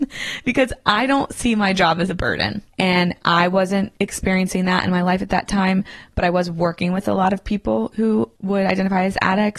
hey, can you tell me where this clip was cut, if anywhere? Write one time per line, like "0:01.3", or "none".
0:02.7